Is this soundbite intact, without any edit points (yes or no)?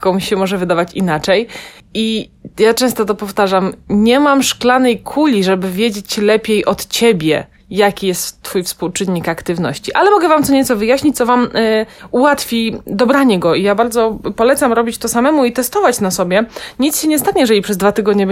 yes